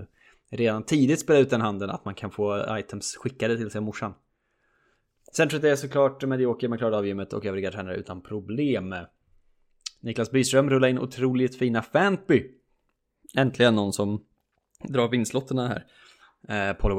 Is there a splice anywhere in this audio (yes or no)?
no